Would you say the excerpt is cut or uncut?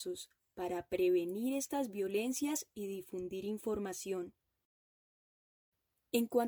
uncut